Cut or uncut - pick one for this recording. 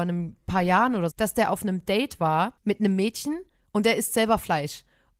cut